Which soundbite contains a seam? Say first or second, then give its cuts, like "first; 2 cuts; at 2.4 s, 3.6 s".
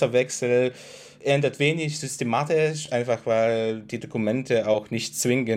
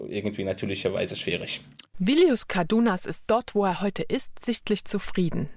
second; 1 cut; at 1.8 s